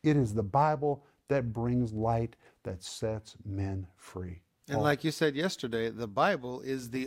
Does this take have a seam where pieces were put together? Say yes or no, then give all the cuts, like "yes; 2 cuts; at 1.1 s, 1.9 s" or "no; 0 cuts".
no; 0 cuts